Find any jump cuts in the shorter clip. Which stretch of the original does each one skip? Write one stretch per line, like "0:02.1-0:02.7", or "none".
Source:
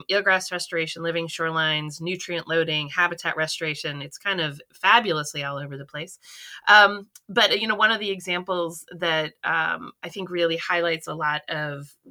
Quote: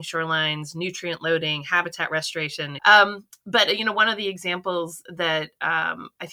0:04.0-0:06.6